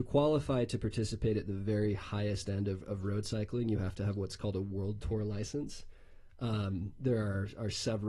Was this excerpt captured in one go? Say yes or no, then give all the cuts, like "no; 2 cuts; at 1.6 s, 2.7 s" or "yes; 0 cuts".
yes; 0 cuts